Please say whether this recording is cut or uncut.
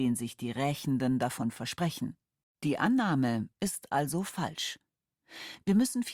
cut